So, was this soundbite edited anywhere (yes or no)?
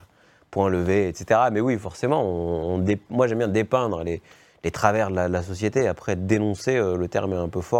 no